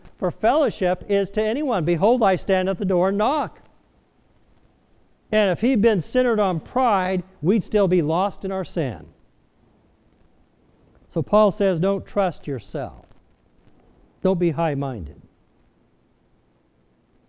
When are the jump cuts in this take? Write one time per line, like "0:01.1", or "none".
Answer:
0:05.2

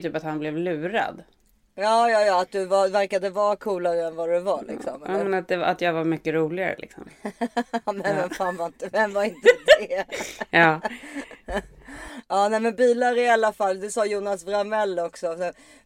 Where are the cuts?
none

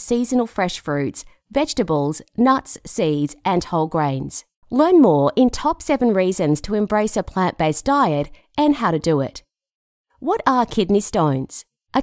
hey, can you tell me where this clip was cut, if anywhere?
0:04.6

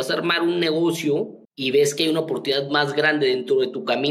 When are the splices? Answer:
0:01.5

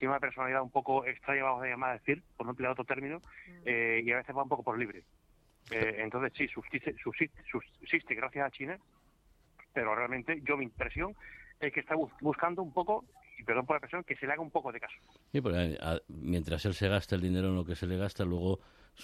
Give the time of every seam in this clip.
none

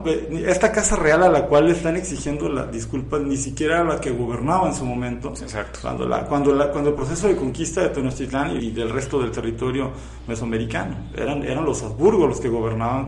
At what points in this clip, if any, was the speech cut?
0:08.6

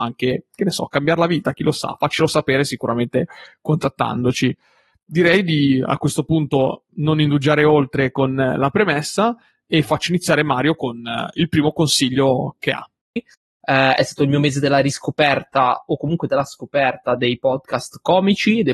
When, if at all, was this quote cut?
0:13.2

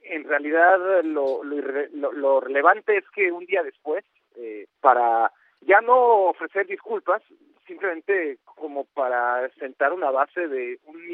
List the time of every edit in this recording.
0:04.8

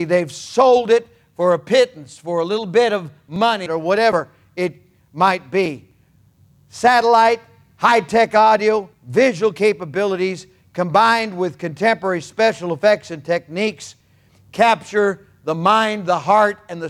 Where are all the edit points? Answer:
0:03.7

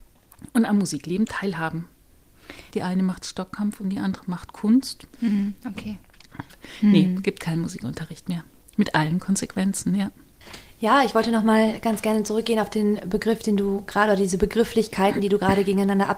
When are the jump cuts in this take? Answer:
0:02.7

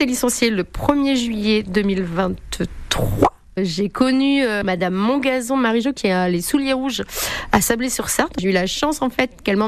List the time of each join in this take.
0:03.6

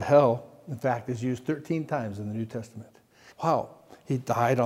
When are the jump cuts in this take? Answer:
0:03.3

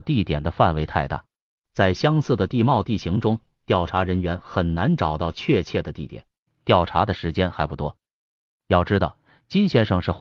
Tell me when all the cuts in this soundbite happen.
0:06.5

